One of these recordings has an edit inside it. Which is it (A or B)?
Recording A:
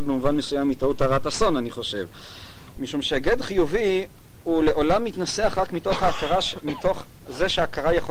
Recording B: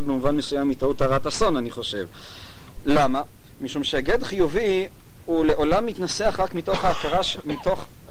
A